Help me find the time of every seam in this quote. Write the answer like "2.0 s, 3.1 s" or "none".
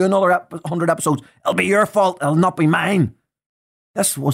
none